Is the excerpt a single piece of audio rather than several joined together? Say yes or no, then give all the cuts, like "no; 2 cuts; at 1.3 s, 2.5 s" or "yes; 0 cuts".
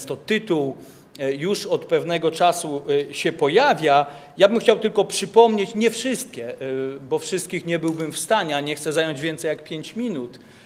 yes; 0 cuts